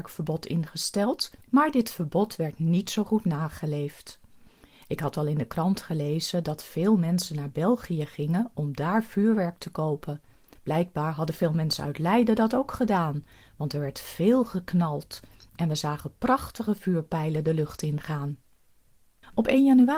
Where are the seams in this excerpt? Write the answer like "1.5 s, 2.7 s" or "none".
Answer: none